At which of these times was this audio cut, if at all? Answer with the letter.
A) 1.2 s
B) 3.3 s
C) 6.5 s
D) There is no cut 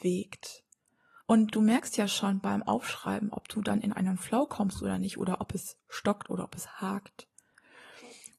A